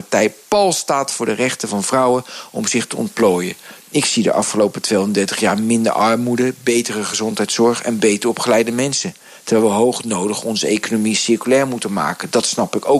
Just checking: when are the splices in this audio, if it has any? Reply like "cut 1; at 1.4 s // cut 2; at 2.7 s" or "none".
cut 1; at 3.8 s